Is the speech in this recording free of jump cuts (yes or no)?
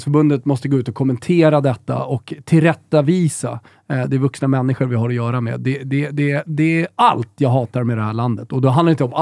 yes